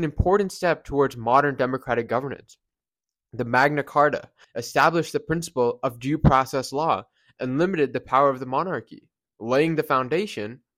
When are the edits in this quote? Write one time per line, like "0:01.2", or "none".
0:04.4